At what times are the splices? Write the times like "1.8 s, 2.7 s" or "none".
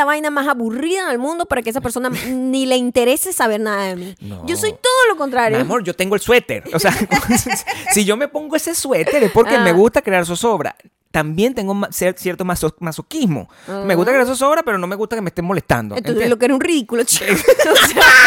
none